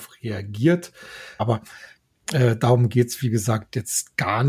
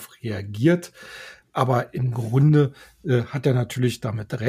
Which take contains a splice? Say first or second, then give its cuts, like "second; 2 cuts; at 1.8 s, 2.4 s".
first; 1 cut; at 1.4 s